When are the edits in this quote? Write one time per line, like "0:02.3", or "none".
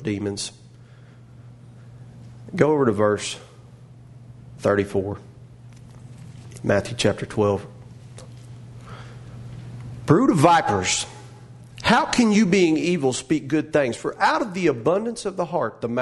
none

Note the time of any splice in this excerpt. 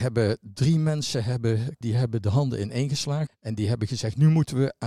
0:01.8
0:03.3

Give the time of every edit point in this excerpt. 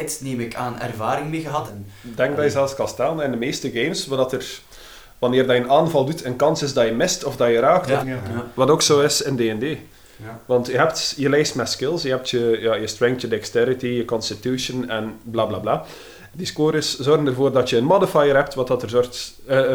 0:01.7
0:08.0
0:16.3

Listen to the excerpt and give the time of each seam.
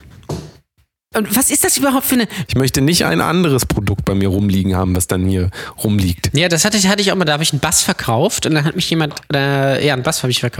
0:02.5

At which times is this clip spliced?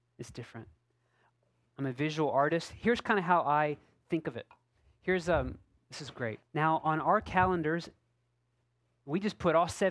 0:06.4

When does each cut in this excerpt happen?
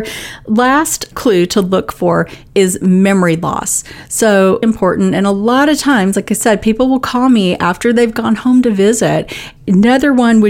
0:04.6
0:09.6

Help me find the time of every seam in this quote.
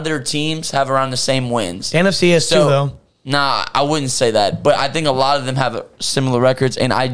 none

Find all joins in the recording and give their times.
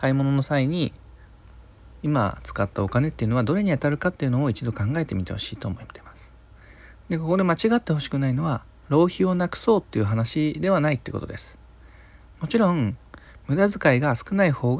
none

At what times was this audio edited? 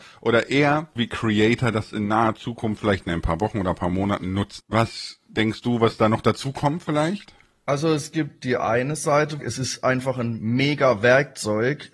0:01.0
0:04.6
0:09.4

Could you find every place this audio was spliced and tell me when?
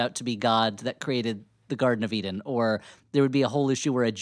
none

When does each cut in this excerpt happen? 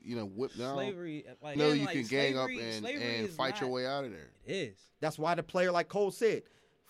0:01.6
0:04.3

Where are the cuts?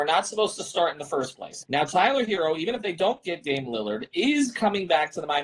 0:01.6

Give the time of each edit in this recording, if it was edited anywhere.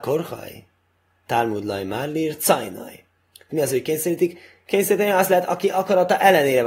0:03.5

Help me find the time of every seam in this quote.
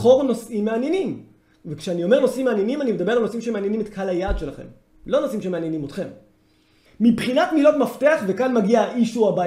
0:06.9

